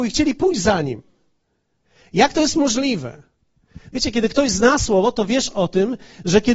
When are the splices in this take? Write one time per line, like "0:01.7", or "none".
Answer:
none